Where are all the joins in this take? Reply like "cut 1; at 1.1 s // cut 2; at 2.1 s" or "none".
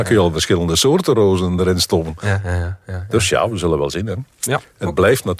none